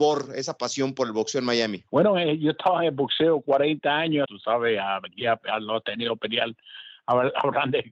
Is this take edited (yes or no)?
yes